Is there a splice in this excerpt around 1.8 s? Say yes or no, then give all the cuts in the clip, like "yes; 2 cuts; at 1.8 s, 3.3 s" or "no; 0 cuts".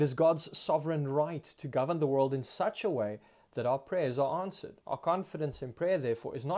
no; 1 cut; at 4.8 s